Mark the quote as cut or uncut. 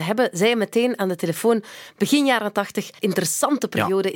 cut